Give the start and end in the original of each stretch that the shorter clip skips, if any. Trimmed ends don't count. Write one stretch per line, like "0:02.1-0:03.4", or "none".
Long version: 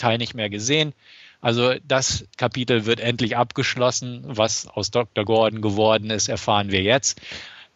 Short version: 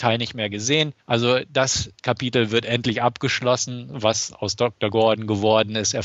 0:01.0-0:01.3